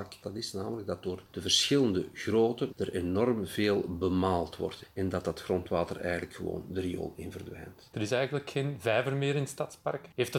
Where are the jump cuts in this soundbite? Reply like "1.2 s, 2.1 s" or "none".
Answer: 2.7 s, 7.9 s